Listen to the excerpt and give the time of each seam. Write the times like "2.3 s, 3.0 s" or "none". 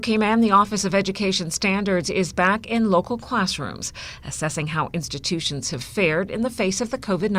none